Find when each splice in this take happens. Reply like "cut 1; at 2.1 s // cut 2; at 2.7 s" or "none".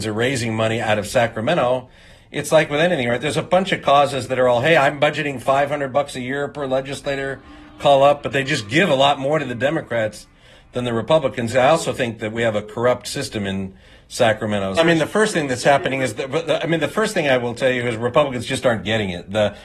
cut 1; at 11.5 s // cut 2; at 14.8 s